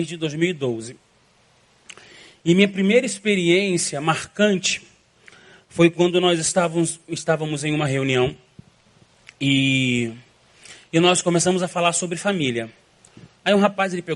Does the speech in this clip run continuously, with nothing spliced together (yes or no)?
yes